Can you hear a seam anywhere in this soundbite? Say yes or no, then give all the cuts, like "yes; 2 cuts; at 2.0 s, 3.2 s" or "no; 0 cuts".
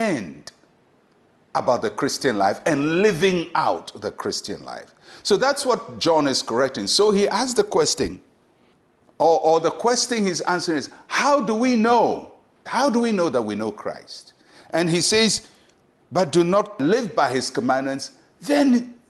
yes; 2 cuts; at 12.7 s, 16.0 s